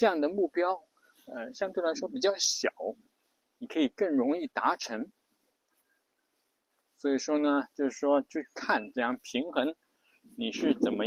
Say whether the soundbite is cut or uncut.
uncut